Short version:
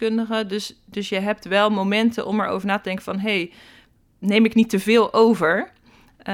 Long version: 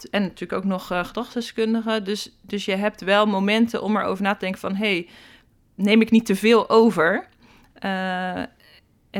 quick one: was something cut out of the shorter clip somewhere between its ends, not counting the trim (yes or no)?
no